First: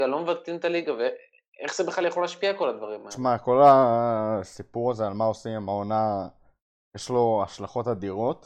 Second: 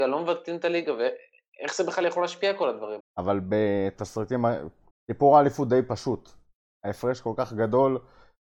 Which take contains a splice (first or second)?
second